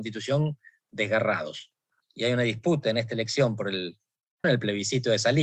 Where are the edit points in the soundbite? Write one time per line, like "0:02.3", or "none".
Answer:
0:02.0
0:04.4